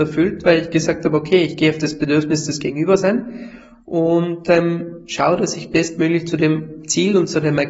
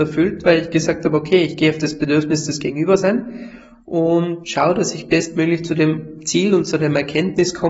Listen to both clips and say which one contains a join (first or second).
second